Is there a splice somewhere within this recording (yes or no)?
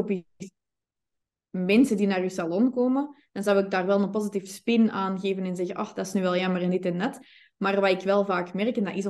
no